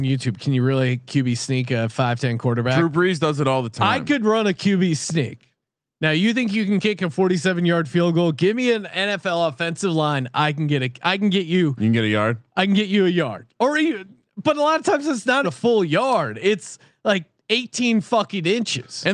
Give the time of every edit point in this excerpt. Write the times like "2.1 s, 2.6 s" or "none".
15.4 s